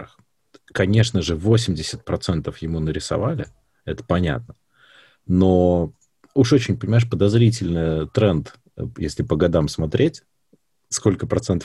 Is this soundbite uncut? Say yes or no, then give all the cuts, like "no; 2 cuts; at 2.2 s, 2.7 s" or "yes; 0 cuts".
yes; 0 cuts